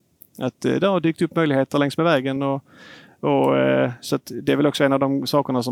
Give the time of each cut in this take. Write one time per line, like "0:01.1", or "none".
none